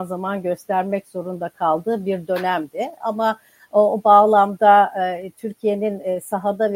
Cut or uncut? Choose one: uncut